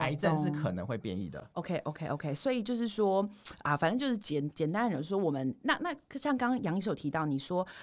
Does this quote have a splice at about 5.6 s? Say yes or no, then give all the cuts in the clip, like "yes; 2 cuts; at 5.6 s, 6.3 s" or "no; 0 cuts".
no; 1 cut; at 4.2 s